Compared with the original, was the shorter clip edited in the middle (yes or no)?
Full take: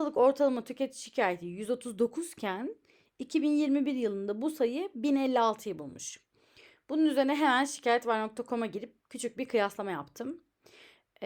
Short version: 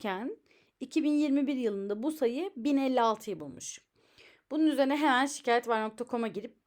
no